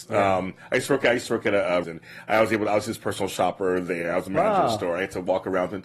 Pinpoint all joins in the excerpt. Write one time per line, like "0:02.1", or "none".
0:01.8